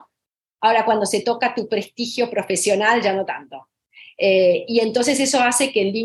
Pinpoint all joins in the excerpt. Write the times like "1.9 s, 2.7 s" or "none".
none